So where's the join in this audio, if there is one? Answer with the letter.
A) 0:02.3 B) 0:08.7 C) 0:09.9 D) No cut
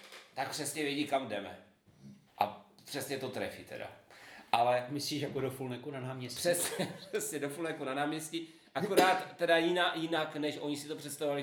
A